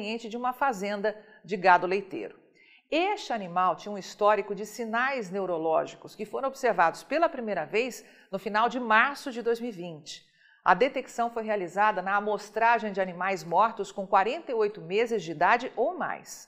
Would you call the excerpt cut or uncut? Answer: uncut